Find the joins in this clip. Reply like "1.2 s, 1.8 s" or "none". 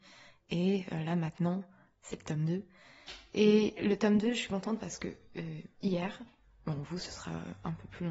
none